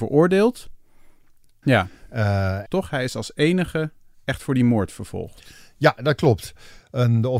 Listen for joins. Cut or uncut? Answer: cut